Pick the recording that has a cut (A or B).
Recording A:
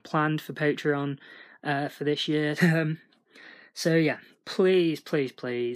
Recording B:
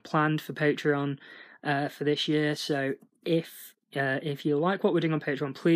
A